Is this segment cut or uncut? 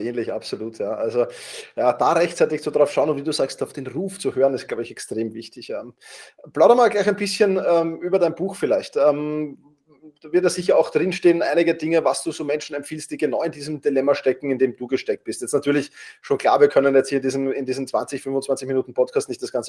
uncut